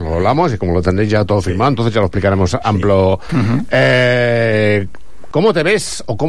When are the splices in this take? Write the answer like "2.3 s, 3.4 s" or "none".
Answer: 3.3 s